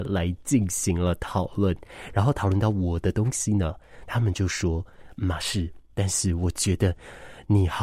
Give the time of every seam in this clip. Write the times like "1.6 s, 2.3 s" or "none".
5.9 s